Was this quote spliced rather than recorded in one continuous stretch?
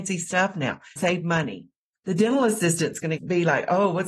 yes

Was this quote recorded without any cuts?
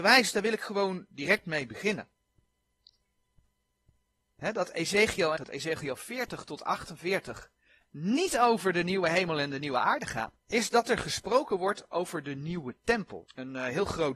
no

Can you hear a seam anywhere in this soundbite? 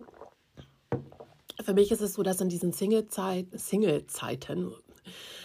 no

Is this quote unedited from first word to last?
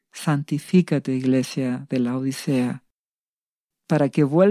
yes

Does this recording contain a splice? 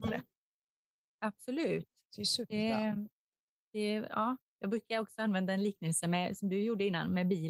no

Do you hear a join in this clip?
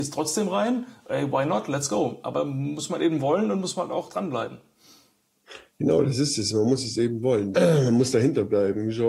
yes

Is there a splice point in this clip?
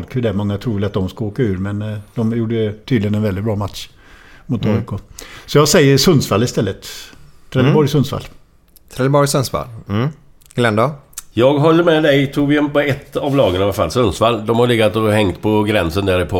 no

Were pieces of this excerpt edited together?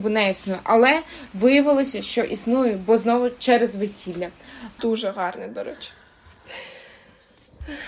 yes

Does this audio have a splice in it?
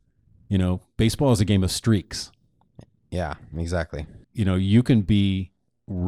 yes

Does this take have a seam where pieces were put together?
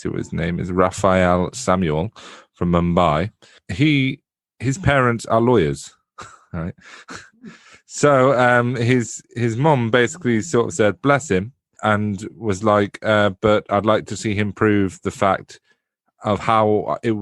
no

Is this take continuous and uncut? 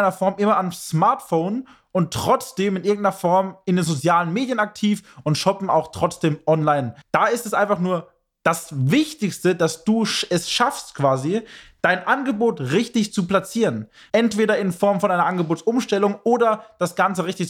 no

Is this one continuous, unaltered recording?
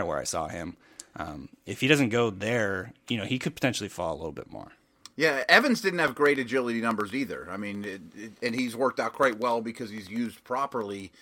yes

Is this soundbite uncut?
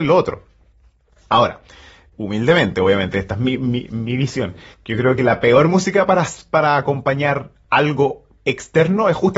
no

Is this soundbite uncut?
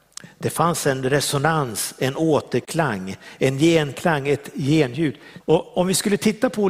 no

